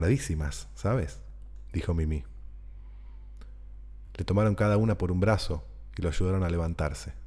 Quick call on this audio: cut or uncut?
uncut